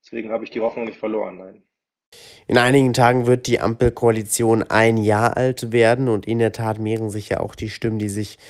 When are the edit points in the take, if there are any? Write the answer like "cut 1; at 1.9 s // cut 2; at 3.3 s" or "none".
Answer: none